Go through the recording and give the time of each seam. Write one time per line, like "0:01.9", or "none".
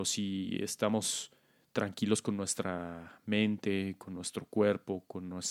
none